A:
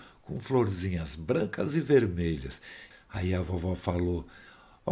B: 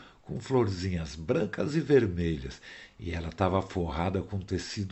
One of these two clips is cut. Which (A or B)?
A